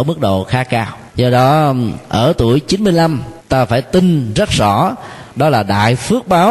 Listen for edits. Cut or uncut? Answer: cut